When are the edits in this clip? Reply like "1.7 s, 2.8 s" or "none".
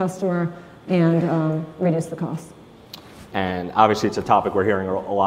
3.3 s